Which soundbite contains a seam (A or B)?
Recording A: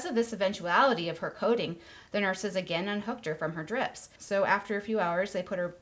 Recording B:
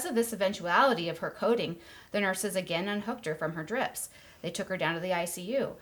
A